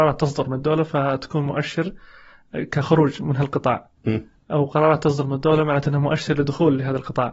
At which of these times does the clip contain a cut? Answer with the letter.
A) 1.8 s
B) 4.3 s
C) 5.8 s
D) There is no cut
D